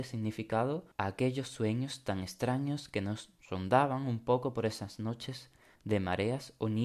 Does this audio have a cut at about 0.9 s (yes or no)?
yes